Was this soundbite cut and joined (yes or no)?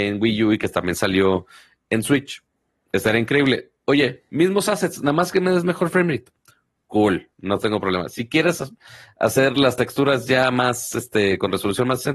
no